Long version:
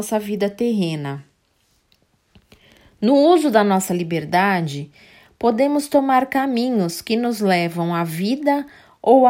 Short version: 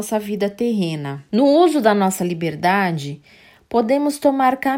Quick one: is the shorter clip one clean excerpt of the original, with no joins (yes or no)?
no